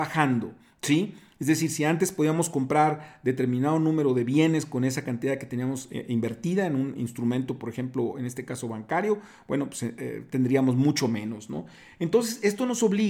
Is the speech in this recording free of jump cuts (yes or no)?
yes